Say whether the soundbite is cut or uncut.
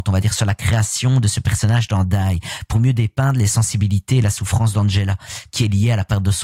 uncut